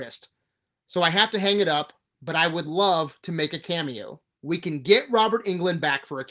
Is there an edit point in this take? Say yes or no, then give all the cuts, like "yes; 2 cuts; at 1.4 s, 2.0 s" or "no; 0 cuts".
yes; 1 cut; at 4.4 s